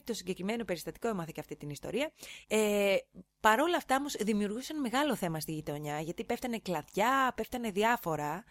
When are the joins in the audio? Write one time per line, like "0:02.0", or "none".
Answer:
0:02.4